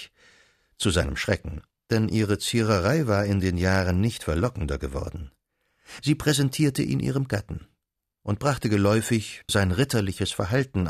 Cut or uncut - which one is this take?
cut